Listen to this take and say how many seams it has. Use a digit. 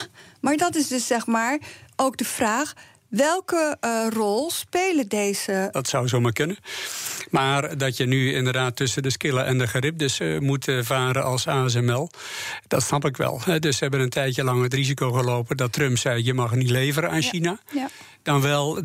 1